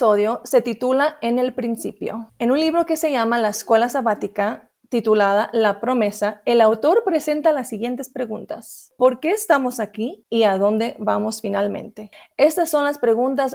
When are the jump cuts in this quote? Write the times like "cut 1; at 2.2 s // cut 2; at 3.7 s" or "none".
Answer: cut 1; at 10.2 s